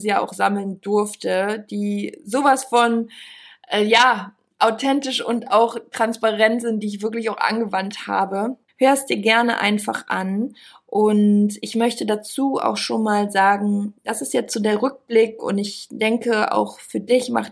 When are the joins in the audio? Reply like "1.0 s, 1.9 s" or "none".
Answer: 8.7 s